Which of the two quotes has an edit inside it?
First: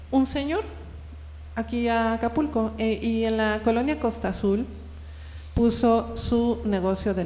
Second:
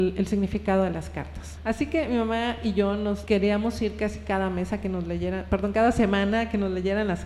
second; 2 cuts; at 1.6 s, 3.3 s

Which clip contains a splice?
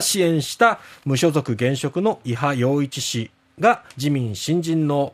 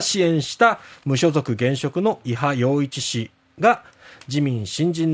first; 1 cut; at 3.9 s

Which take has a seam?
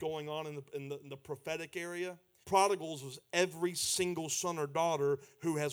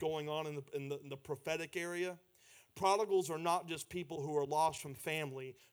first; 1 cut; at 2.4 s

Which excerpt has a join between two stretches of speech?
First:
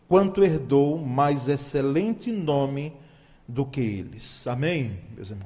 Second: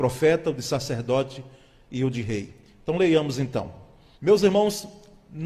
second; 1 cut; at 4.1 s

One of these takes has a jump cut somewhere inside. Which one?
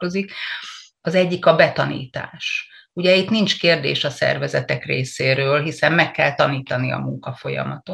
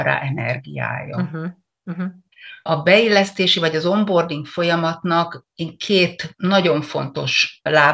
first; 1 cut; at 1.0 s

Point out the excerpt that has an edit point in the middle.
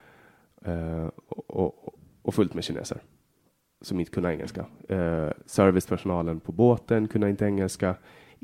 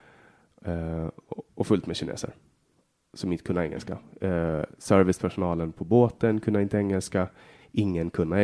second; 1 cut; at 1.5 s

